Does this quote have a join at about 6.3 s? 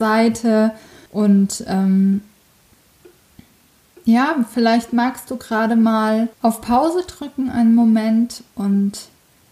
yes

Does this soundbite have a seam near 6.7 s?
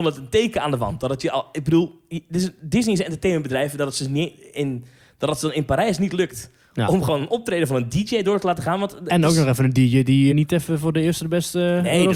no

